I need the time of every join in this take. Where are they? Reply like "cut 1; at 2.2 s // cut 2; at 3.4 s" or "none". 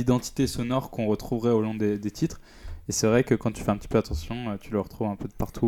none